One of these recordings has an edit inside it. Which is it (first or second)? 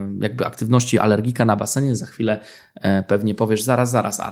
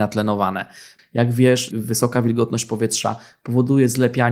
second